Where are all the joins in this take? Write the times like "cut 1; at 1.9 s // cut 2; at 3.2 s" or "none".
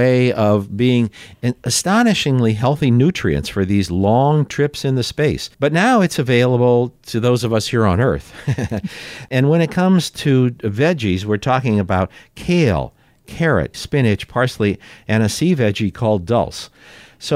cut 1; at 5.5 s // cut 2; at 13.7 s